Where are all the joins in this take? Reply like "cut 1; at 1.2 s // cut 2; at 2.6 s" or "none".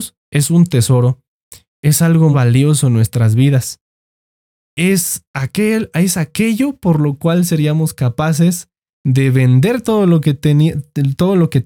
cut 1; at 2.3 s